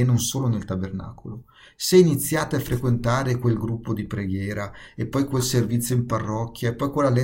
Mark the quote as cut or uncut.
uncut